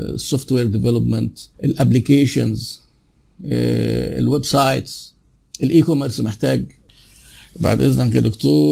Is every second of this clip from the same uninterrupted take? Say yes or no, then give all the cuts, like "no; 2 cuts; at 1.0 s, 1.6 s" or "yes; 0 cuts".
no; 1 cut; at 1.5 s